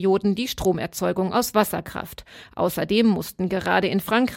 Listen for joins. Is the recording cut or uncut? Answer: uncut